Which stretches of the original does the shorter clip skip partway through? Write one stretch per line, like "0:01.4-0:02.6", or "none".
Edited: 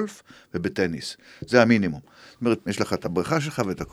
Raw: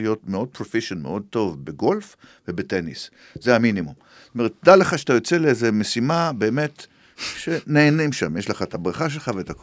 0:04.6-0:08.3